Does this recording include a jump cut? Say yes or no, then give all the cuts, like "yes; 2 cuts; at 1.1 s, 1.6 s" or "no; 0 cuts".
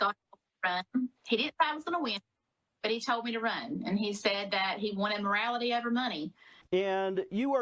yes; 1 cut; at 6.6 s